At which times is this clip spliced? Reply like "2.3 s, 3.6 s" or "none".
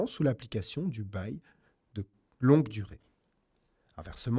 none